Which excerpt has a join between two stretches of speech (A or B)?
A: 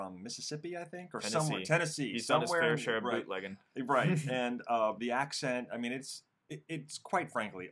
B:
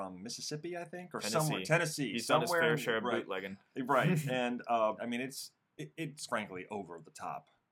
B